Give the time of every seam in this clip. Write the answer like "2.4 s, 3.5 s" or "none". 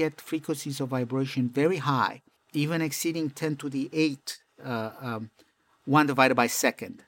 2.4 s